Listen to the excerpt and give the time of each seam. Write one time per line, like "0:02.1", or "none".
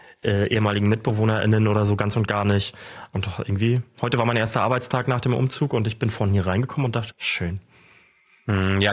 0:03.1
0:07.1